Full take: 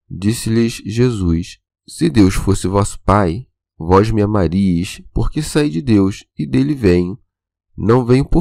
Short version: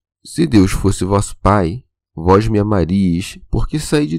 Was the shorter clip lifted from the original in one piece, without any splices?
yes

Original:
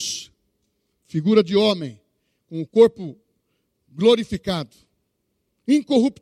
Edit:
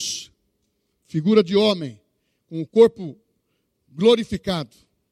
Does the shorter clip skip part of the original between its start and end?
no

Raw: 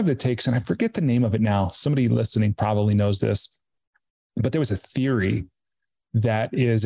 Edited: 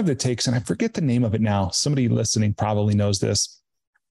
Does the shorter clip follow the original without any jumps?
yes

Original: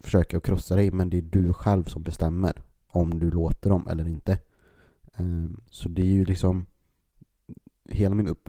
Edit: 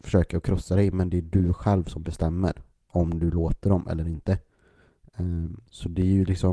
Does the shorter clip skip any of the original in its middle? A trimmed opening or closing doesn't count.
no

